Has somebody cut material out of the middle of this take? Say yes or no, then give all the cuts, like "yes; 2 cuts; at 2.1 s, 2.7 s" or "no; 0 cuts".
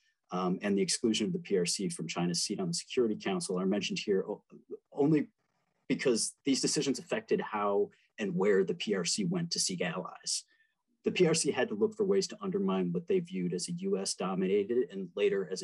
no; 0 cuts